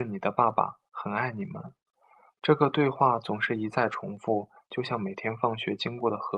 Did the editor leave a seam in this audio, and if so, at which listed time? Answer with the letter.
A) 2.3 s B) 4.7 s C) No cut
C